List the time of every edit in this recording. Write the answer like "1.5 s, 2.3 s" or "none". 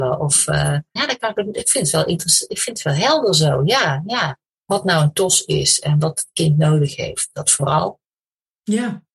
1.0 s